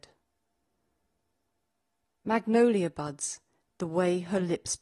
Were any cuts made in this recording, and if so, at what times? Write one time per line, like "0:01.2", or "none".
0:02.1
0:03.6